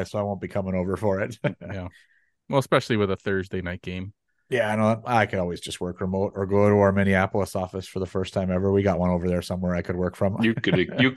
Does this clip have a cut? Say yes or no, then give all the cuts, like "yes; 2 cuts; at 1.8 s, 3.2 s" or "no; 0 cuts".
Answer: no; 0 cuts